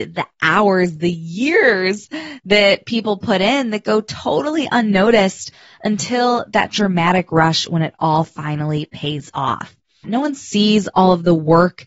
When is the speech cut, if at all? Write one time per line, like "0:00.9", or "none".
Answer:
0:10.0